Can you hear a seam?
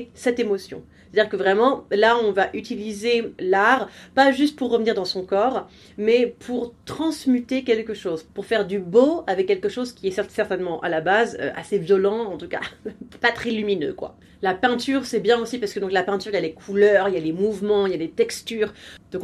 no; 0 cuts

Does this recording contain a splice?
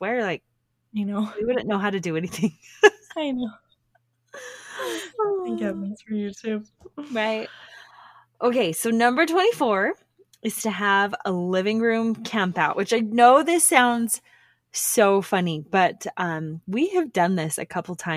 no; 0 cuts

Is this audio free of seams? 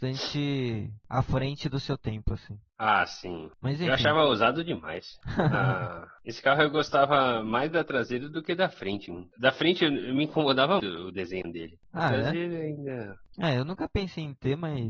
no; 3 cuts; at 3.5 s, 10.8 s, 13.3 s

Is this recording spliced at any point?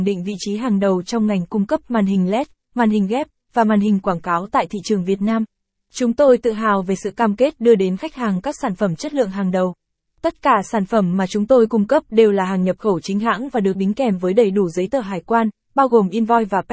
no; 0 cuts

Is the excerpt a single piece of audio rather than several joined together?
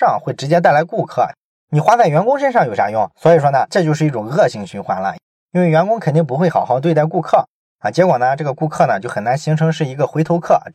yes; 0 cuts

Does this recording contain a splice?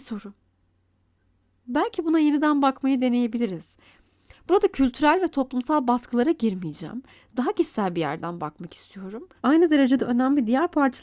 yes; 1 cut; at 9.4 s

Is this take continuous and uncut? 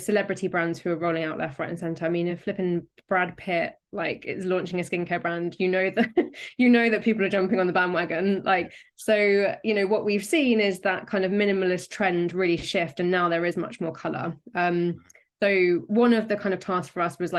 yes; 0 cuts

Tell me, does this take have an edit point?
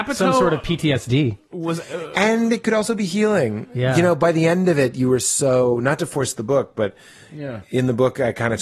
no; 0 cuts

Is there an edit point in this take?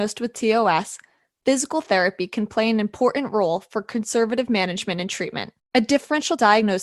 yes; 1 cut; at 5.6 s

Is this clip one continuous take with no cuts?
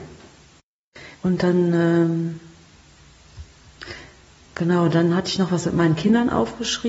no; 1 cut; at 1.1 s

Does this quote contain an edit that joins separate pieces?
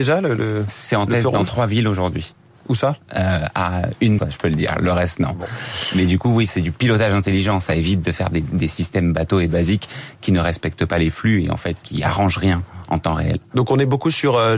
yes; 1 cut; at 4.2 s

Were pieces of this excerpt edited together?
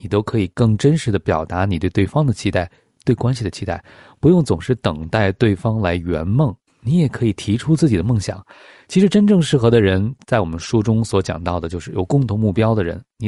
no; 0 cuts

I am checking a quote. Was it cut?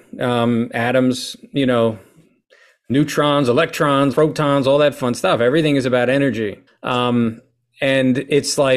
yes; 2 cuts; at 4.1 s, 6.7 s

